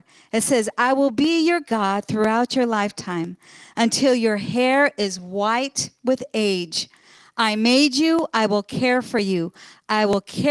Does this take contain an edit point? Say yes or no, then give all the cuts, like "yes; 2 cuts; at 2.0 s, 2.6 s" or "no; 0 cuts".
no; 0 cuts